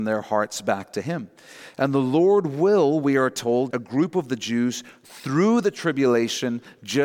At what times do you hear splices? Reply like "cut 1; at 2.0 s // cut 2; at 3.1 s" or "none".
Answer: cut 1; at 3.7 s